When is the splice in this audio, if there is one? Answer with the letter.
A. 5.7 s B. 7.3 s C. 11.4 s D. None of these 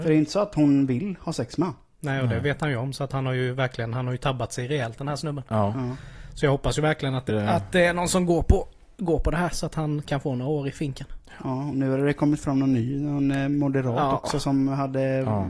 B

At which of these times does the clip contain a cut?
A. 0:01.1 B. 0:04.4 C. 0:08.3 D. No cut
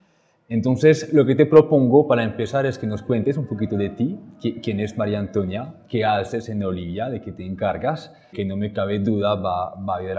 C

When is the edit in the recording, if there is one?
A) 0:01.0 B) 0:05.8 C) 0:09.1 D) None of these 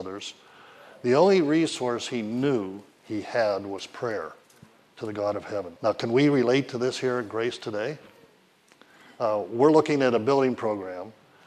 B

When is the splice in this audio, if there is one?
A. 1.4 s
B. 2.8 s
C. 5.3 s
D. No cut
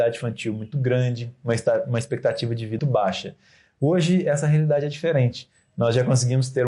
B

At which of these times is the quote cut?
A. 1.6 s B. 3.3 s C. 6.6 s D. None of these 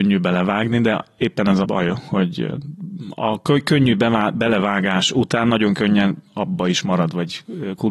A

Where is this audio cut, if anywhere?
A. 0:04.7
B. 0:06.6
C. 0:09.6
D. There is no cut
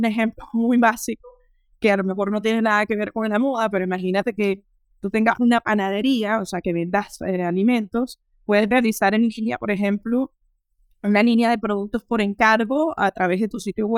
D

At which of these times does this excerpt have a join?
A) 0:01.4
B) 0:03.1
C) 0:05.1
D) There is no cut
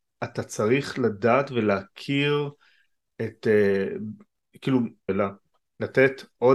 C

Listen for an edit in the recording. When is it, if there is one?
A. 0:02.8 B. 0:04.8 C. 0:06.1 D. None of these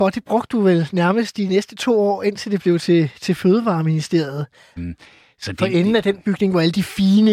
B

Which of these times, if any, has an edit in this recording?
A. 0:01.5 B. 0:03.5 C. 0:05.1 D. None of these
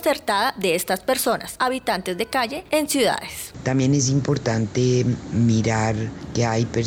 B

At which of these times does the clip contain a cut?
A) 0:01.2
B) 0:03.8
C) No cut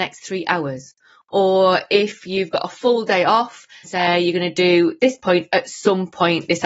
B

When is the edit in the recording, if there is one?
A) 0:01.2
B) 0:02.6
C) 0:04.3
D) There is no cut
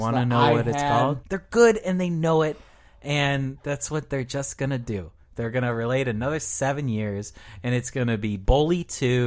A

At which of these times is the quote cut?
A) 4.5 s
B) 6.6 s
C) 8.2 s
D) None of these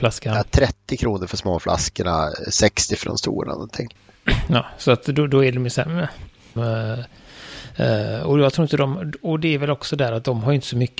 B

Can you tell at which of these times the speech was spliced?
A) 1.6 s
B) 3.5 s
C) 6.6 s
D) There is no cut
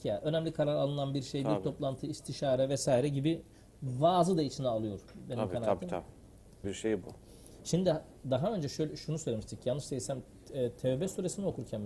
C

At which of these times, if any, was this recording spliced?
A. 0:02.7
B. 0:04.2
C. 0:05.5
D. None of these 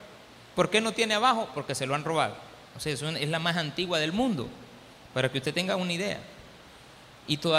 A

